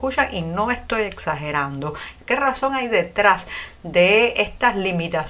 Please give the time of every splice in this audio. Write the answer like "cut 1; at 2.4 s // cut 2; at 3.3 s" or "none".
cut 1; at 2.3 s